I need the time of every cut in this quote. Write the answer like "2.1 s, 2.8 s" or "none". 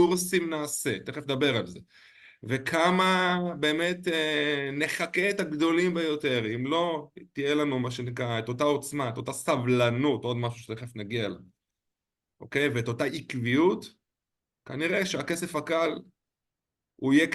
none